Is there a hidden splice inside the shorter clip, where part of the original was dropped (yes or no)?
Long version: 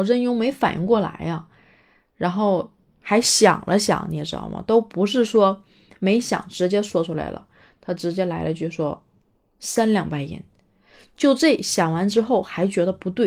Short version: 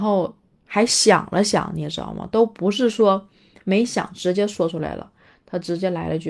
no